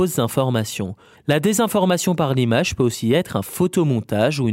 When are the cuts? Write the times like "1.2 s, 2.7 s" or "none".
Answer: 1.1 s